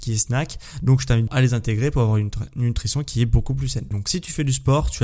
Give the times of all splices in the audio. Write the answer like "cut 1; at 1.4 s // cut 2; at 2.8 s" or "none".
cut 1; at 1.3 s // cut 2; at 3.9 s